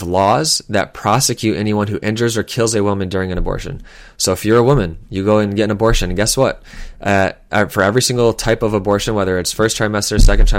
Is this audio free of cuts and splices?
yes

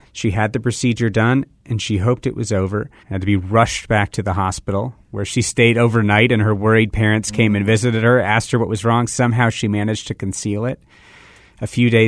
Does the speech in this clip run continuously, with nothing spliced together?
no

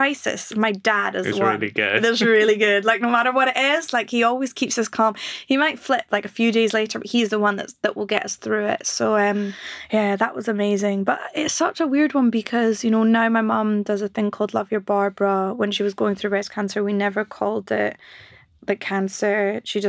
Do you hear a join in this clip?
no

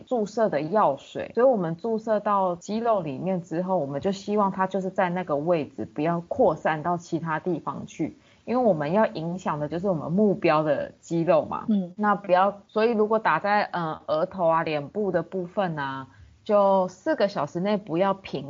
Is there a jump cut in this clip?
no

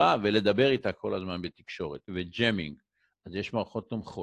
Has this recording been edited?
yes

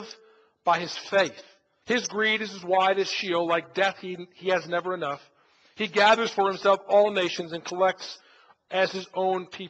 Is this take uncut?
no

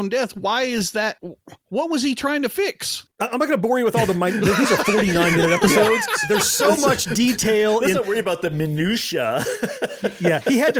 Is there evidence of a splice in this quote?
no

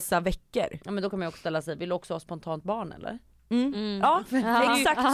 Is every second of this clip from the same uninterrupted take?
yes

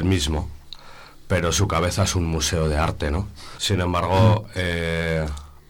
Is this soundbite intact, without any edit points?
no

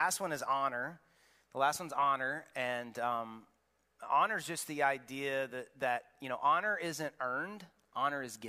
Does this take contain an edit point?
no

